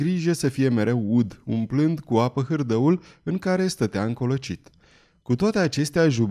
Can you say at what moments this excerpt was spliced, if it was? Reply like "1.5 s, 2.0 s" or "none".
none